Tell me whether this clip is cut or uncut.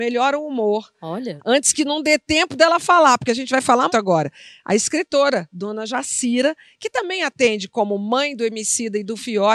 cut